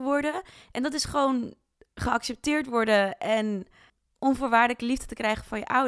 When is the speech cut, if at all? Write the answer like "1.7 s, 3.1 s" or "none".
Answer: none